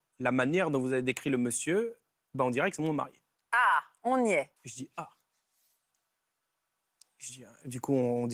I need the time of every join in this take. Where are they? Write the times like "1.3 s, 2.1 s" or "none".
4.6 s